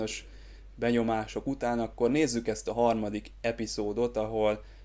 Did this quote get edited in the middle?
no; 0 cuts

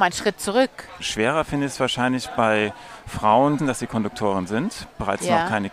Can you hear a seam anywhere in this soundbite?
yes; 2 cuts; at 1.0 s, 3.6 s

